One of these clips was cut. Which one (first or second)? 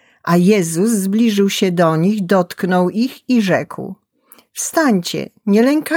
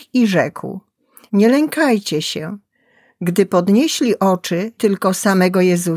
second